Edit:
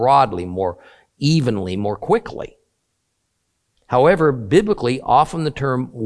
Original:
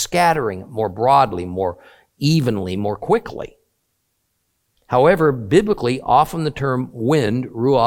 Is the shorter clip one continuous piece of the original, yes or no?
yes